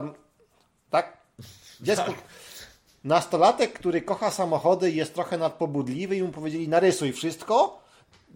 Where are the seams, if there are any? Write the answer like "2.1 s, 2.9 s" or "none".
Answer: none